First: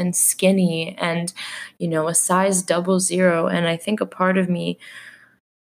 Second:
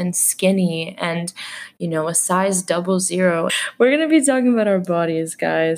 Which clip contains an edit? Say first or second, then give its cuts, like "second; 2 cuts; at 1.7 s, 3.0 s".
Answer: second; 1 cut; at 3.5 s